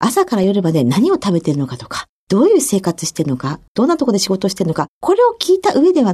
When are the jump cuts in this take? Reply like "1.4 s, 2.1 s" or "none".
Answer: 3.7 s